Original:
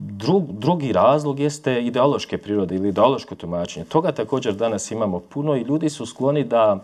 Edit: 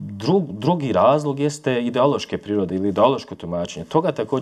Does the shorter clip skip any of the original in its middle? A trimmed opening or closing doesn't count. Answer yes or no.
no